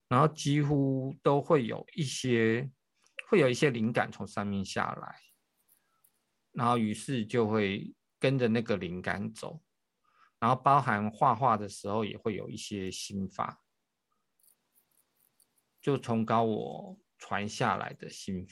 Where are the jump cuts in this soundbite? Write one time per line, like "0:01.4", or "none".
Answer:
none